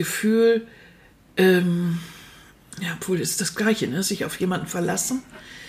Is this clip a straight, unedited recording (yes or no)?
yes